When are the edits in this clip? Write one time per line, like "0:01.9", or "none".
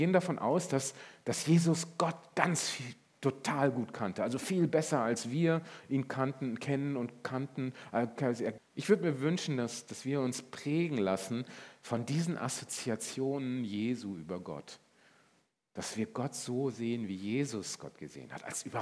0:08.6